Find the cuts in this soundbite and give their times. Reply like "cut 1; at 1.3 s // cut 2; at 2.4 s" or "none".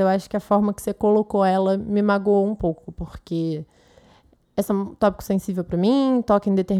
none

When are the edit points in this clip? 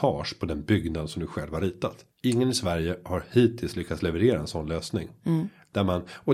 cut 1; at 2.1 s

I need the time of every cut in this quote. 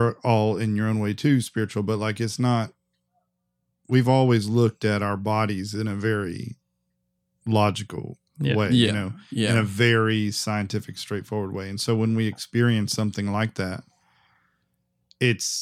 none

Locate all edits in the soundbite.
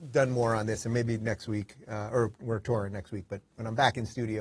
cut 1; at 2.3 s

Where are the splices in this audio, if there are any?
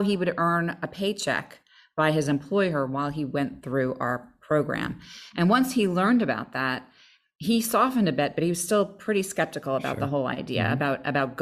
none

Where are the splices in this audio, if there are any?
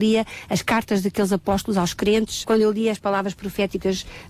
cut 1; at 2.4 s

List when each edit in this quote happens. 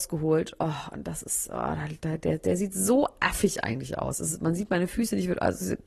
cut 1; at 2.0 s

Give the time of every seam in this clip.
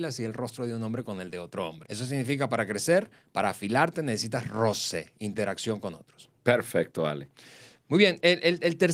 cut 1; at 1.9 s

